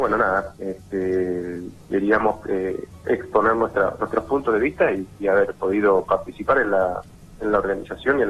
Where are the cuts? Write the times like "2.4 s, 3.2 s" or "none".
none

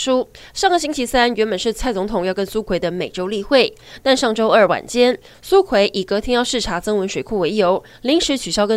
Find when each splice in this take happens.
none

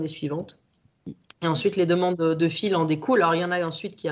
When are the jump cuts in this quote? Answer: none

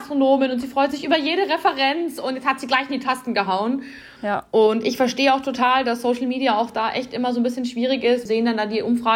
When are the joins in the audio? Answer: 4.2 s, 8.3 s

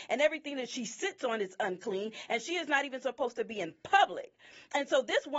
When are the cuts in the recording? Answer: none

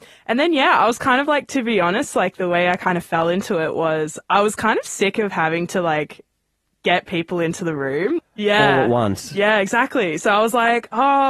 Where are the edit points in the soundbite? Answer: 8.2 s

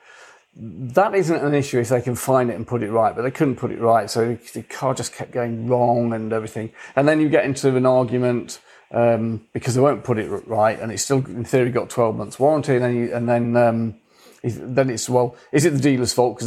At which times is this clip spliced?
none

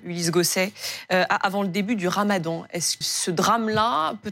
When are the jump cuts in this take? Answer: 3.0 s

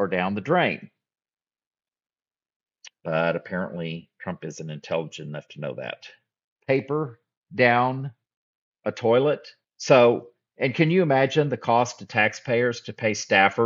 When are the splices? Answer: 6.5 s, 9.6 s

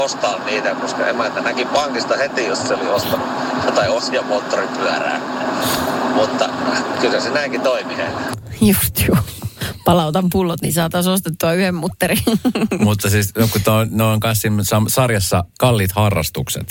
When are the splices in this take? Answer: 15.5 s

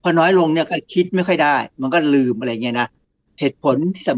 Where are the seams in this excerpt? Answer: none

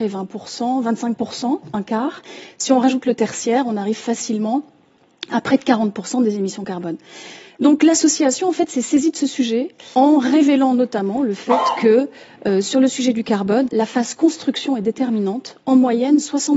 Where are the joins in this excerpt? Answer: 9.9 s, 13.7 s

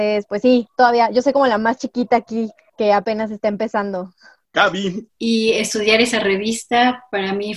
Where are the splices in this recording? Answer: 5.1 s

